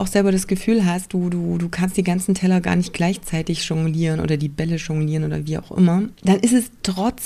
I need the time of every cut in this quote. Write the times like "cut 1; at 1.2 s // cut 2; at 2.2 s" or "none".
cut 1; at 6.1 s